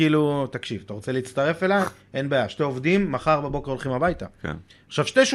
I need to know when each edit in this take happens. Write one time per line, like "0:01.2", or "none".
none